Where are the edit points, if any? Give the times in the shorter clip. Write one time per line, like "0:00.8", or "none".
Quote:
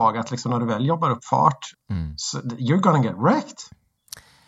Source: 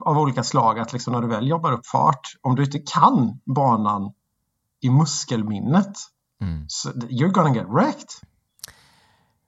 0:01.7